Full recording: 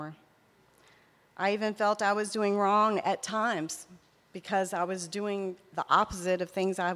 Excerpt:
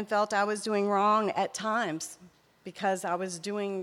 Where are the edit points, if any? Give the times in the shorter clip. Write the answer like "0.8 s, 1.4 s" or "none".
none